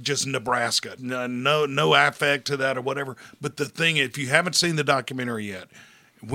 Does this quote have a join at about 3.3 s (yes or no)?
no